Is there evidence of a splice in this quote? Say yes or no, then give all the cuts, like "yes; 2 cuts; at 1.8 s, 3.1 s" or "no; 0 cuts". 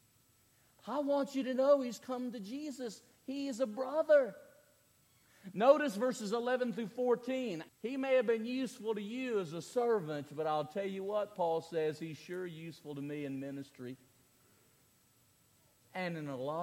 yes; 1 cut; at 7.7 s